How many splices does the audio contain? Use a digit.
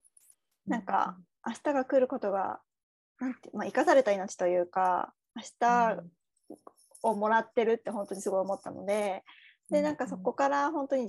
0